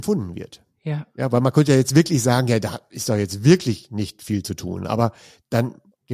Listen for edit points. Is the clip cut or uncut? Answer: uncut